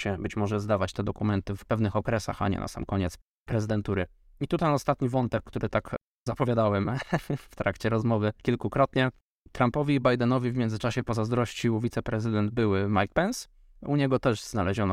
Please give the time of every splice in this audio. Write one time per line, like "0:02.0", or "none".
0:01.6
0:08.4

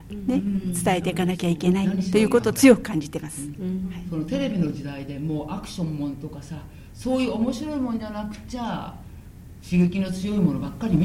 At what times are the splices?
none

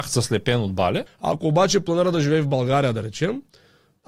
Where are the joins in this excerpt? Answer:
0:01.1

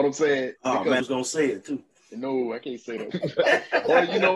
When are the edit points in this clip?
0:01.0
0:03.1

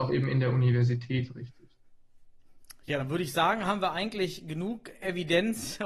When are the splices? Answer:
none

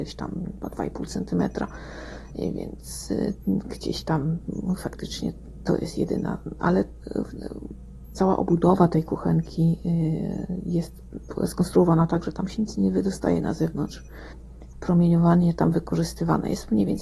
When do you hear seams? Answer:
0:14.7

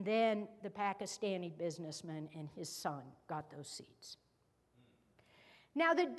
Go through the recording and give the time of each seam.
none

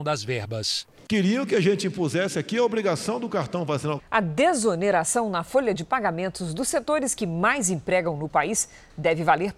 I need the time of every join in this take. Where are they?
0:01.0
0:04.0

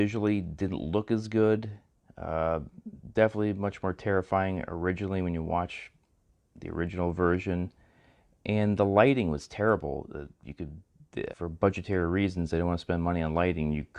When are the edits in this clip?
0:11.3

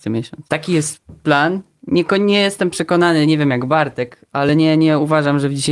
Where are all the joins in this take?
none

